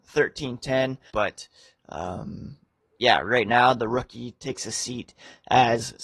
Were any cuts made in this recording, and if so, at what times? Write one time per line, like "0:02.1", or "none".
0:01.1